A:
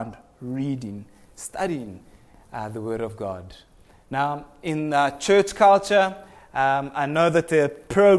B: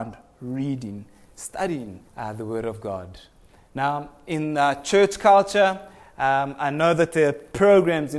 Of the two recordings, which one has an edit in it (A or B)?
B